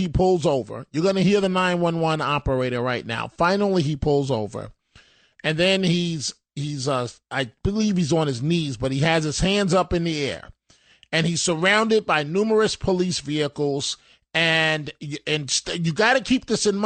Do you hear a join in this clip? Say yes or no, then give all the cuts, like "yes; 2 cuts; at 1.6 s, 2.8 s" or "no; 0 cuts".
no; 0 cuts